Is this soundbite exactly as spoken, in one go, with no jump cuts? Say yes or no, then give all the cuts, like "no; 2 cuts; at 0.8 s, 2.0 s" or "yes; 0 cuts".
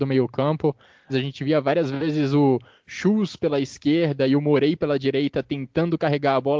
no; 1 cut; at 1.1 s